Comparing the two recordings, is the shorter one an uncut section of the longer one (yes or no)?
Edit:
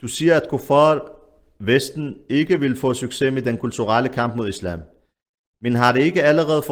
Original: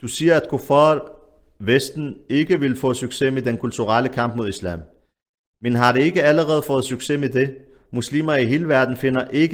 yes